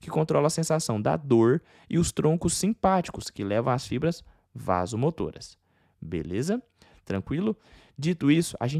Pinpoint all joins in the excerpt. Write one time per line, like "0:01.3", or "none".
none